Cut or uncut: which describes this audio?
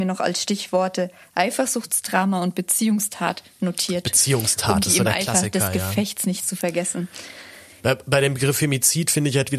cut